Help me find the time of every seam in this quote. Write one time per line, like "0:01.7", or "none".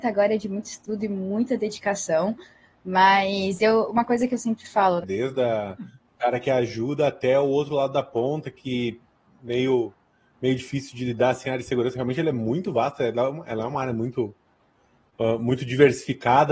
0:05.0